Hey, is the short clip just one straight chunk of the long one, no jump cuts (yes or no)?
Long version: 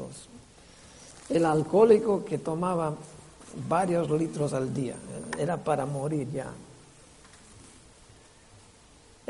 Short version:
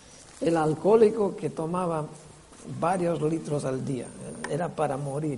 yes